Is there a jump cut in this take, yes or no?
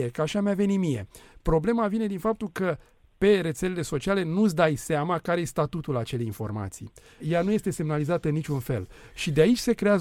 yes